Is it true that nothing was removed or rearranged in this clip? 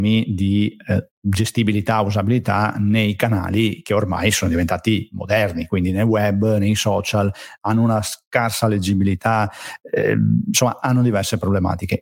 no; 1 cut; at 1.2 s

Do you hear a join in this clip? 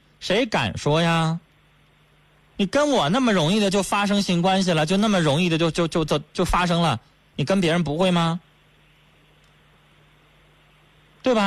no; 0 cuts

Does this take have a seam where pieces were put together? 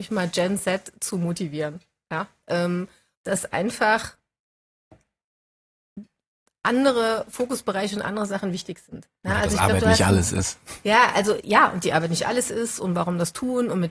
yes; 1 cut; at 3.1 s

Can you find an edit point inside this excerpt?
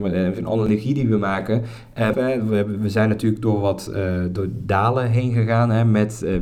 yes; 1 cut; at 2.1 s

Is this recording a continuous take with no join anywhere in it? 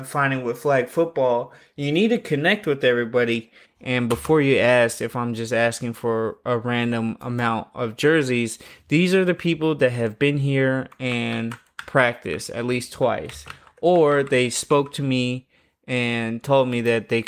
no; 1 cut; at 3.6 s

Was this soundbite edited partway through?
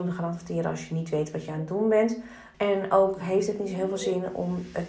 yes; 1 cut; at 2.5 s

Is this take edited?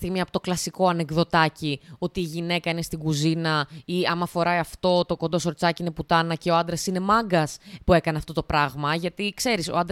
no; 0 cuts

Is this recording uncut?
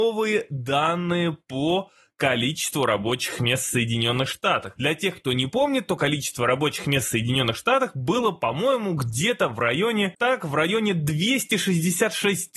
yes; 0 cuts

